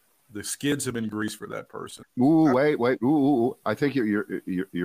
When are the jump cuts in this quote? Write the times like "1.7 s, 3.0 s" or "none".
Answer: 2.0 s